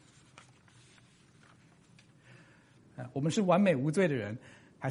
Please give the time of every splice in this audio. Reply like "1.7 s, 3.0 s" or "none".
2.8 s